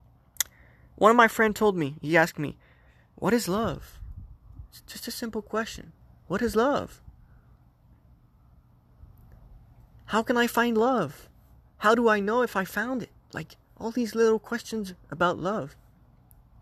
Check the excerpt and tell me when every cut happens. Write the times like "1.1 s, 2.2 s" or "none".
none